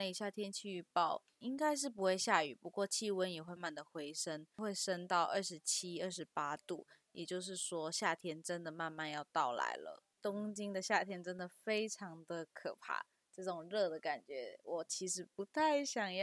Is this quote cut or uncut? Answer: cut